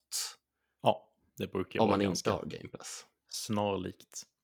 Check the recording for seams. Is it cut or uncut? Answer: uncut